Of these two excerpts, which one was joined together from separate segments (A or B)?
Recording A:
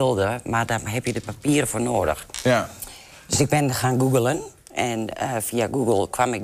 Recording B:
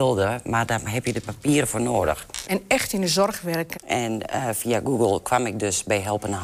B